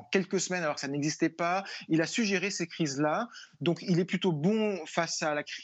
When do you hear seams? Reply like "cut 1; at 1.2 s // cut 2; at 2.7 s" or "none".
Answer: none